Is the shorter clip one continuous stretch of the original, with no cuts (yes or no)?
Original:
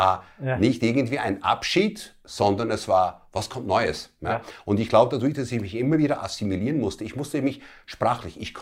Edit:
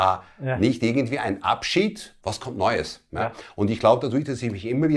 no